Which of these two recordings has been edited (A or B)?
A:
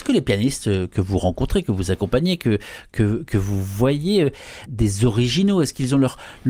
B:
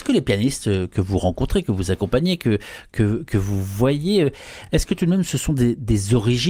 A